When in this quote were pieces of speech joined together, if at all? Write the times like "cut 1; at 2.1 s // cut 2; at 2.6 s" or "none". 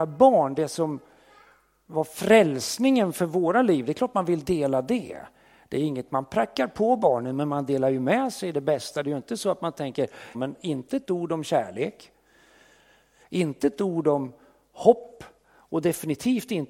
cut 1; at 10.3 s